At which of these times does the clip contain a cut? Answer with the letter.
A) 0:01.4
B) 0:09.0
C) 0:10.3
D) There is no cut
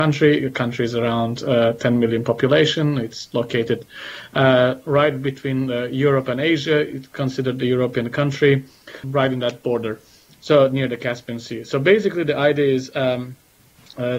B